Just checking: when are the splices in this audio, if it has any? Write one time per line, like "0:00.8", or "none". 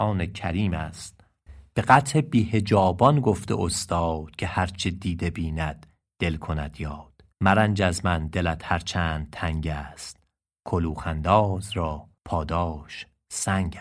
0:07.3
0:12.2